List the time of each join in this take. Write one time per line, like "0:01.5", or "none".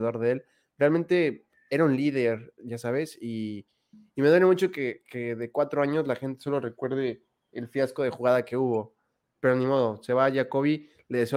0:09.2